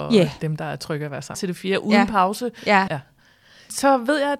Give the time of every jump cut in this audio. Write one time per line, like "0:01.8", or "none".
0:01.3
0:02.9